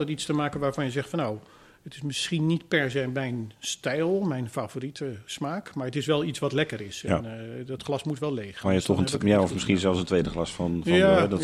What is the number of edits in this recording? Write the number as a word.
zero